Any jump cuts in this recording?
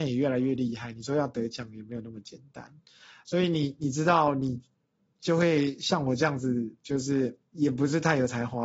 no; 0 cuts

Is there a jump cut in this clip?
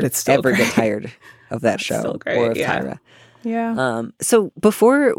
no; 0 cuts

